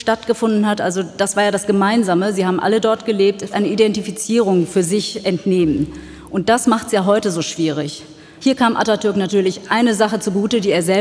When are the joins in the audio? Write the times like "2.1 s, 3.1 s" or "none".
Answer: 3.5 s, 8.4 s